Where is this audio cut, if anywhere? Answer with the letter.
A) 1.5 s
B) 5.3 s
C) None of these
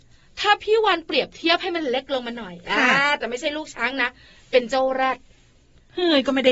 C